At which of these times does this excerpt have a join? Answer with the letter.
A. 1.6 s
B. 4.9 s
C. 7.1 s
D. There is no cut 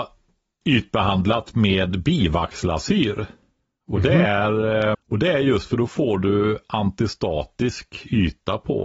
B